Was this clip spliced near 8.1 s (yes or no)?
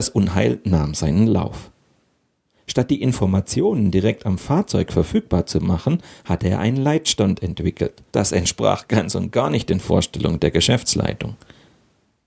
yes